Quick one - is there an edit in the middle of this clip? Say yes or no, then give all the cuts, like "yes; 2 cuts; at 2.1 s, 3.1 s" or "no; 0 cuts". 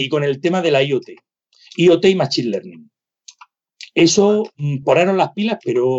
no; 0 cuts